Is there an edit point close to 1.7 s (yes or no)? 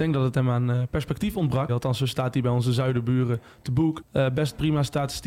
yes